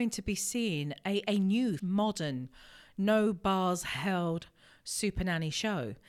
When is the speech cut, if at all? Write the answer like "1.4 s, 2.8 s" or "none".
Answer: 1.8 s